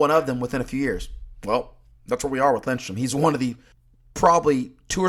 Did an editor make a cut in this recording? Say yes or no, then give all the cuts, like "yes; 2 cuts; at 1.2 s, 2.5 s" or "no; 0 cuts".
no; 0 cuts